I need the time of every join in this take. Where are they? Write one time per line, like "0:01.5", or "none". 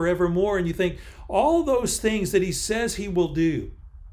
none